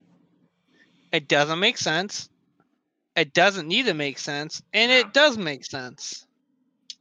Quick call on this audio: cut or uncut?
uncut